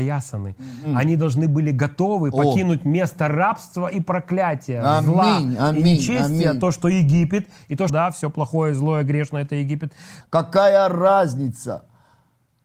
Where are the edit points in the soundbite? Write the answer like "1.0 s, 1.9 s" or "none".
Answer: 7.9 s, 10.2 s